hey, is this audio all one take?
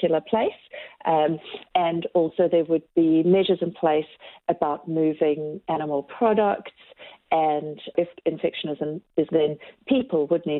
no; 1 cut; at 9.3 s

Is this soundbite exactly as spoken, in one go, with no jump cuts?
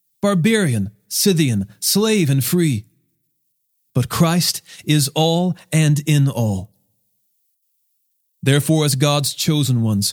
yes; 0 cuts

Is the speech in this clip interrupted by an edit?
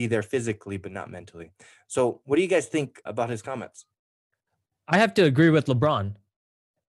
yes; 1 cut; at 3.1 s

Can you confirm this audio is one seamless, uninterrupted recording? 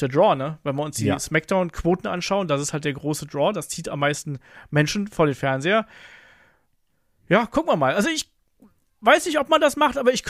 yes; 0 cuts

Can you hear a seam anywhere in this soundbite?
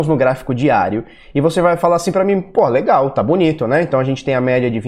no; 0 cuts

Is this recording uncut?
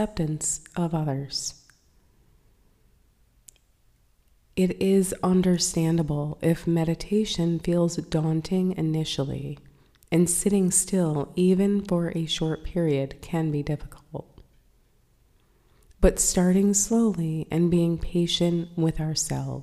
yes; 0 cuts

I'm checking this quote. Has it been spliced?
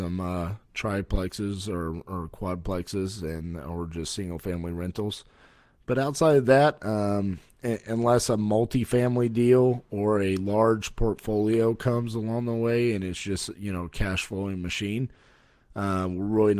no; 0 cuts

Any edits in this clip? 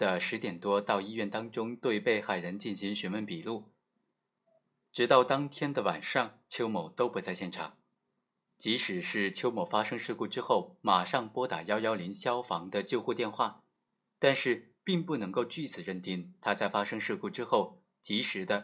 no; 0 cuts

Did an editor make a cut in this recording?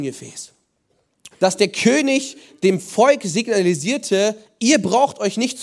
yes; 1 cut; at 1.3 s

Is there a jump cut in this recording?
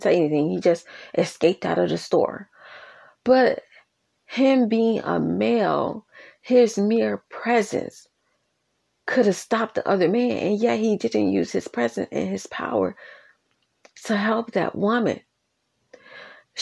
no; 0 cuts

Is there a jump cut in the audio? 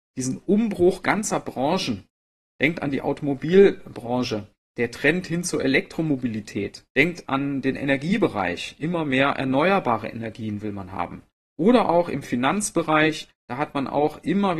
yes; 1 cut; at 6.9 s

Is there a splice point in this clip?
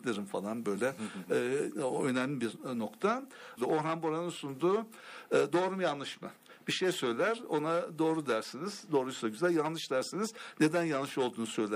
yes; 1 cut; at 3.6 s

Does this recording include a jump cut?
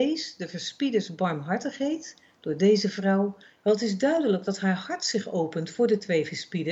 yes; 1 cut; at 3.6 s

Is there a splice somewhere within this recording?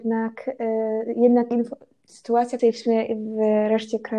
yes; 1 cut; at 2.6 s

